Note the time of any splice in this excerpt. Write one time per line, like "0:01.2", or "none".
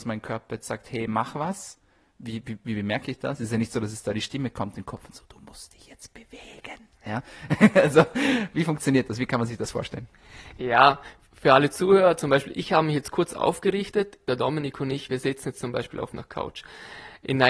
none